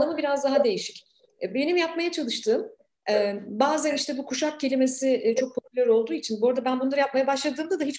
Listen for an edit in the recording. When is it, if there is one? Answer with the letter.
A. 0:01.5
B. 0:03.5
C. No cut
C